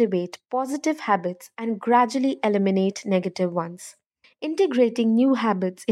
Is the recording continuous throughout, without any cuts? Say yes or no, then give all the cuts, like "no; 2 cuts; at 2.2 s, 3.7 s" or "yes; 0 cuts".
no; 1 cut; at 4.2 s